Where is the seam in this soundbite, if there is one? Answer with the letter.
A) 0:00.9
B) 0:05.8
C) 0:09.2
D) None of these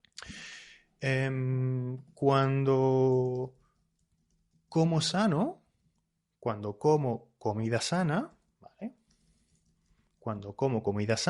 D